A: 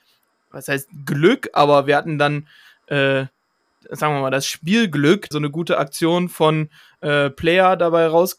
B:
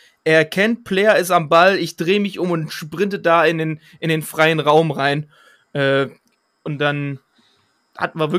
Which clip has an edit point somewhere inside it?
A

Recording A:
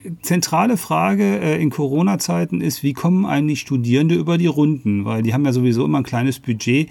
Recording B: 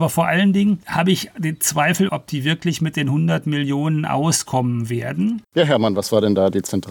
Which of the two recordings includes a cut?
B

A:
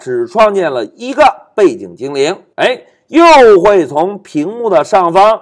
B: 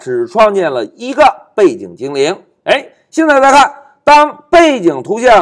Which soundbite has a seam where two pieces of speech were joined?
A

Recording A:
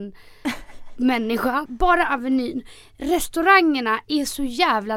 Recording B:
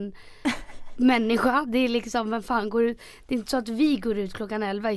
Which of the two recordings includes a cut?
A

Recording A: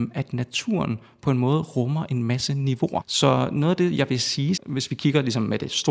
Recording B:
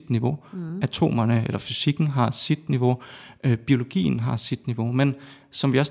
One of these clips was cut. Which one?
A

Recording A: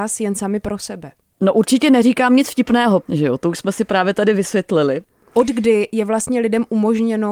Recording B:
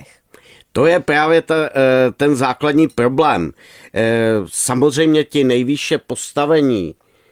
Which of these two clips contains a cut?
A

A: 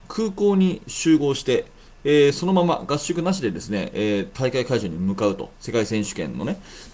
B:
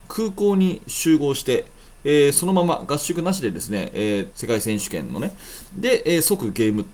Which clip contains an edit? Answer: B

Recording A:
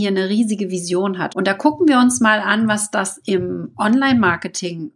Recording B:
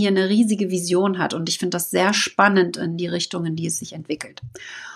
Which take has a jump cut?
A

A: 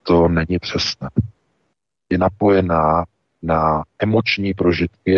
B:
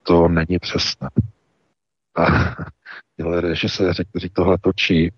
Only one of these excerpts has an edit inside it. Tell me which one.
A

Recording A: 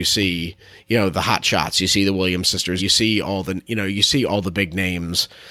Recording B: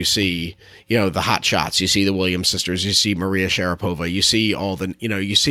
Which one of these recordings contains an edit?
A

